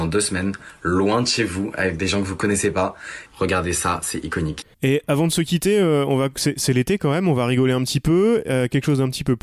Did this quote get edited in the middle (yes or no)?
yes